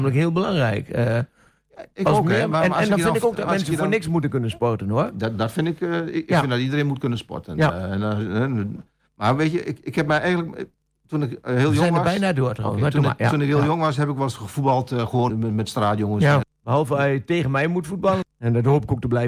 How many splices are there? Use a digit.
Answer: 3